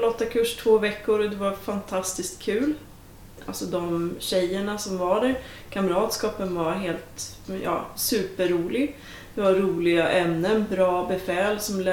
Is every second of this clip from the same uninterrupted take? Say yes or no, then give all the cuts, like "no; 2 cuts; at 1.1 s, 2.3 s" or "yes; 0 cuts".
yes; 0 cuts